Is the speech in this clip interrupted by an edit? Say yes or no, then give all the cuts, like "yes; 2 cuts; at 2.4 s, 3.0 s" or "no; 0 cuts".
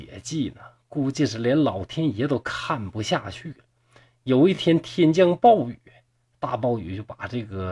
no; 0 cuts